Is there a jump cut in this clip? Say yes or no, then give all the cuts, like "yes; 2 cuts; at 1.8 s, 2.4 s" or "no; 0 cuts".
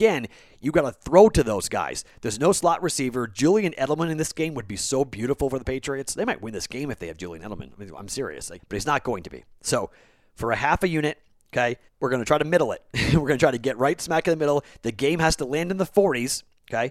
yes; 2 cuts; at 8.6 s, 11.9 s